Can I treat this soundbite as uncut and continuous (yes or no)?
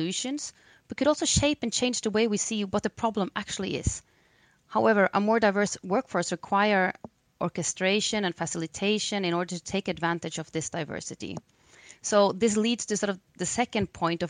yes